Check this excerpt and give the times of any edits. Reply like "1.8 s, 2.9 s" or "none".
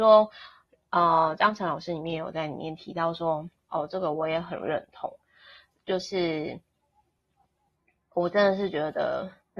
3.7 s

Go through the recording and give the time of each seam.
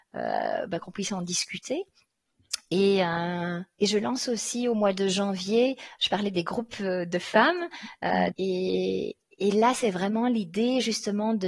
8.3 s

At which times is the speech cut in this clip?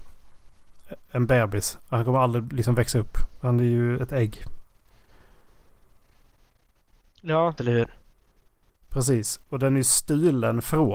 7.6 s

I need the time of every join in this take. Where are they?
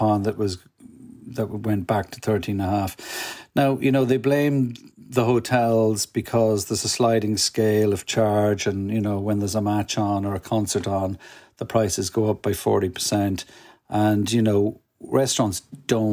none

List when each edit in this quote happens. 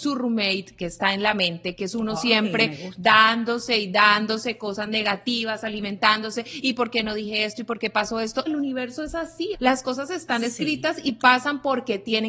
8.5 s, 9.5 s

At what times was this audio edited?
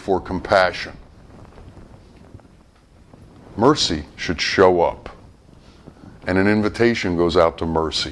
none

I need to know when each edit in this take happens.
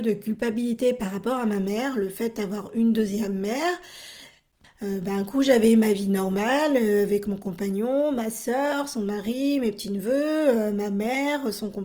4.6 s

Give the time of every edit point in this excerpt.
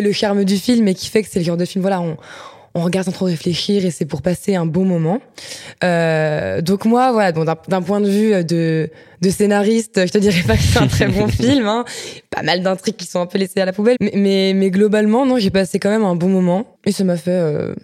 13.9 s, 16.7 s

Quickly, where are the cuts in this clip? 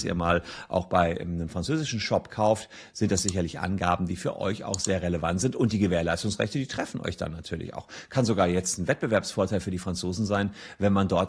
none

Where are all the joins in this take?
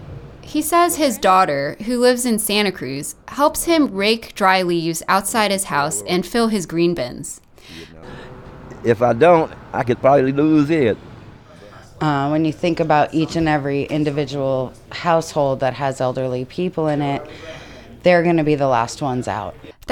8.0 s

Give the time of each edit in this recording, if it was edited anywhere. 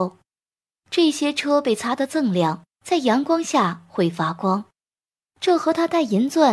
2.7 s

